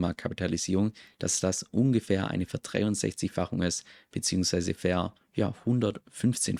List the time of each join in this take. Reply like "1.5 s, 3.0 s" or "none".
none